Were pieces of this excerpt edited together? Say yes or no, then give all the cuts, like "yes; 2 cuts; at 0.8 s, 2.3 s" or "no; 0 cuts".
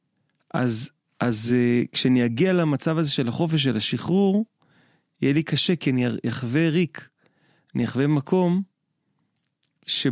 no; 0 cuts